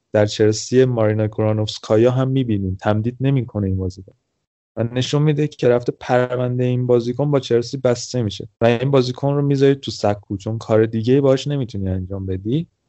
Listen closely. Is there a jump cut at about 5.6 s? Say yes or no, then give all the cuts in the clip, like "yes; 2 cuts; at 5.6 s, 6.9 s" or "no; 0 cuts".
yes; 2 cuts; at 5.6 s, 8.5 s